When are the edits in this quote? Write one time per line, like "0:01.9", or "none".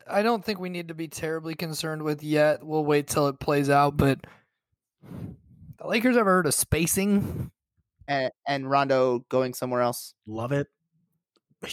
0:08.1